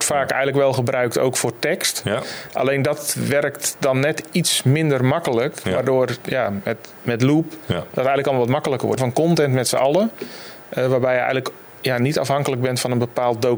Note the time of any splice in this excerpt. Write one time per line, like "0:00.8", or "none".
0:09.0